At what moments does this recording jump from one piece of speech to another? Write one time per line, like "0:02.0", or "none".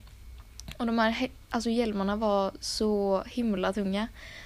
none